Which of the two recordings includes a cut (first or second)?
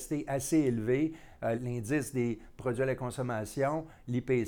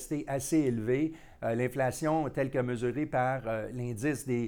first